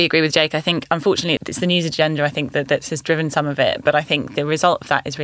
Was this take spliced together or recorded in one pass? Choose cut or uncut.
cut